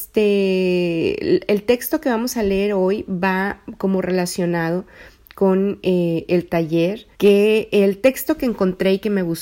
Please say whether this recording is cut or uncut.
cut